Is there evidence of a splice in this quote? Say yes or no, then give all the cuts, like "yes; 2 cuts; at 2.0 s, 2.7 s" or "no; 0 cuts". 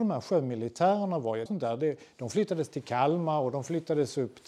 yes; 1 cut; at 1.5 s